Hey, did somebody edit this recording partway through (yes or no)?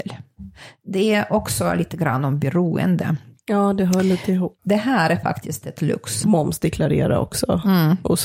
yes